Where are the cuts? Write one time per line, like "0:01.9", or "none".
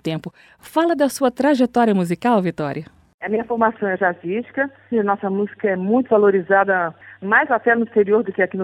0:04.9

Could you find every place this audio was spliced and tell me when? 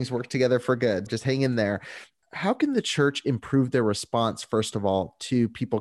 0:01.1

